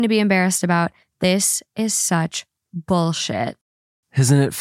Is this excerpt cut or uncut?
cut